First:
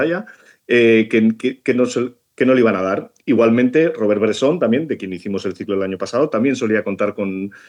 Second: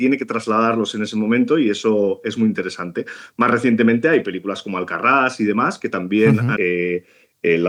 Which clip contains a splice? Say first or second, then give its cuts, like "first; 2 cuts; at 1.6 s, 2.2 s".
second; 1 cut; at 6.6 s